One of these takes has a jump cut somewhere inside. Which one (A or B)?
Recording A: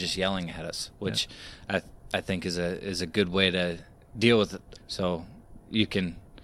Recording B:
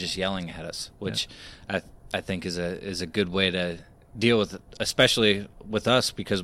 A